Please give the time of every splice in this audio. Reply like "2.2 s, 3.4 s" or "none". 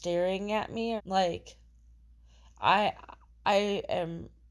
1.0 s